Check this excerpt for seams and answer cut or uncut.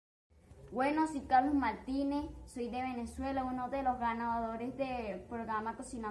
uncut